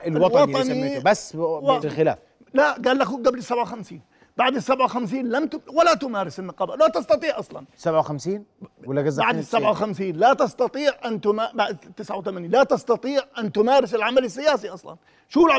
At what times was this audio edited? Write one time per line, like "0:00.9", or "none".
0:01.8